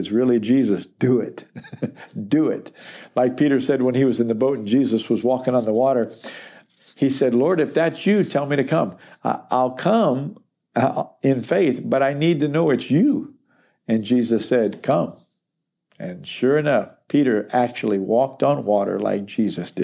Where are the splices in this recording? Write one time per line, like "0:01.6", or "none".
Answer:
none